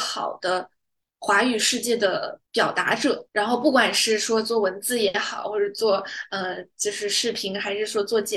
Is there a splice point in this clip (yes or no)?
no